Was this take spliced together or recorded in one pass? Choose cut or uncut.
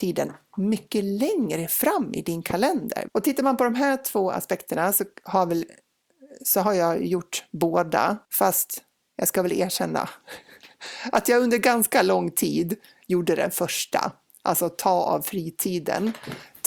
cut